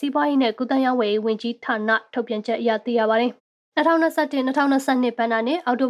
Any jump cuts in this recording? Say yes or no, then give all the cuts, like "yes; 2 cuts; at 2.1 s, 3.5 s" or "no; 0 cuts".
no; 0 cuts